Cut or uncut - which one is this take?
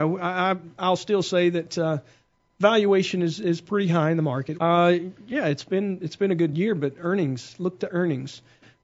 cut